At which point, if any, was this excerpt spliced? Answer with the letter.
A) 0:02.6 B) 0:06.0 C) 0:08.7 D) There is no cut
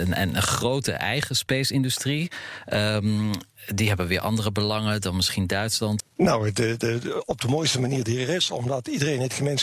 B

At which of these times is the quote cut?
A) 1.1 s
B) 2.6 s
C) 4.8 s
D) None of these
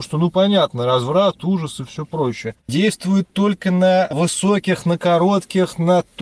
B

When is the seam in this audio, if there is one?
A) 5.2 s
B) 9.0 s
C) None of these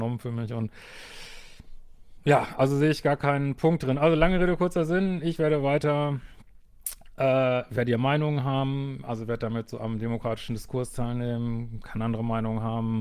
C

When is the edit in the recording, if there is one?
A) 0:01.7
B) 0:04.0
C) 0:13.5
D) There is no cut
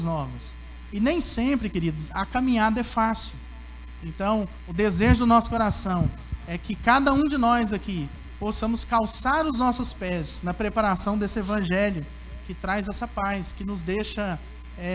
B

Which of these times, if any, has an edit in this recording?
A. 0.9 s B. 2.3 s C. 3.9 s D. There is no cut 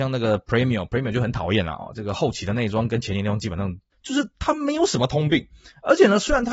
C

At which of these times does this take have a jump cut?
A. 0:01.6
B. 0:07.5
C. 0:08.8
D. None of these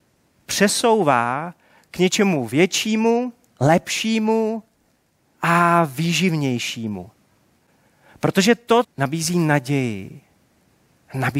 C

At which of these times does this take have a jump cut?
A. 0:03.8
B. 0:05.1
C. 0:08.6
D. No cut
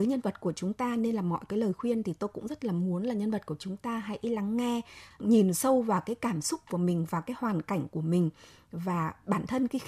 B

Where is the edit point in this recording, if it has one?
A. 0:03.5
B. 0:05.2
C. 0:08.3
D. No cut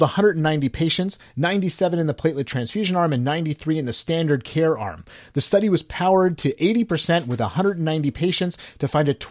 D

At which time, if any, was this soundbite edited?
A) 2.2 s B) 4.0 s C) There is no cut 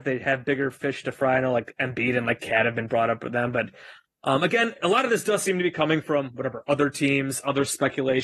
C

